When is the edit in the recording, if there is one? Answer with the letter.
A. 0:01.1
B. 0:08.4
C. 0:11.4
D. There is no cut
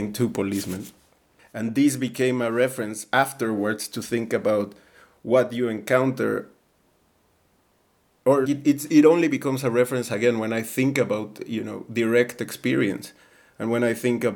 B